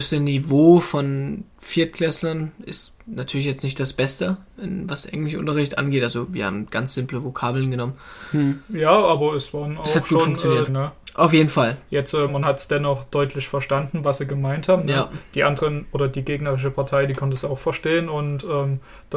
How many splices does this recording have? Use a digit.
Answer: 2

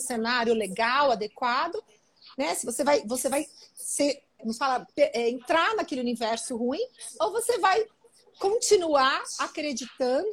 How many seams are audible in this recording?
1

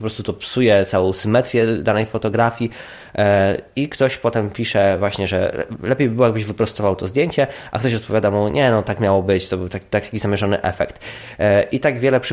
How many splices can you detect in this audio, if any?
0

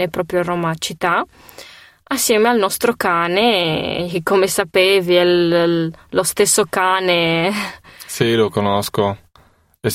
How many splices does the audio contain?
0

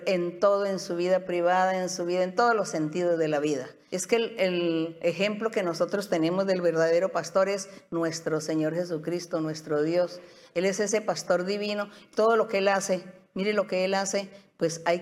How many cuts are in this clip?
1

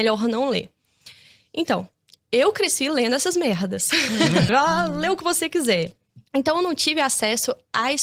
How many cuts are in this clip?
2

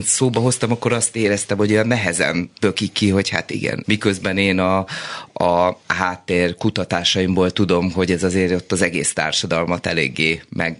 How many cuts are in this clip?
1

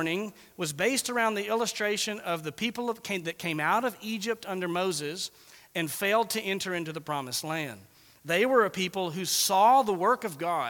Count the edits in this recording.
0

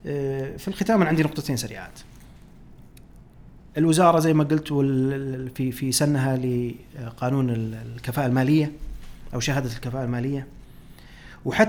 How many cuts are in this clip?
0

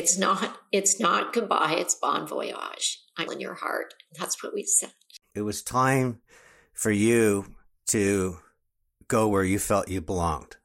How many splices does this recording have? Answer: 2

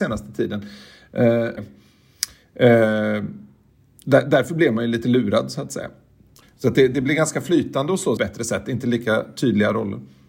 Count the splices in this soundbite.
3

